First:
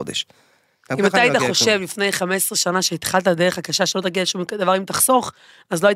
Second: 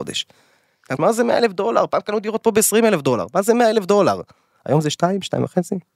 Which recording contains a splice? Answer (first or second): second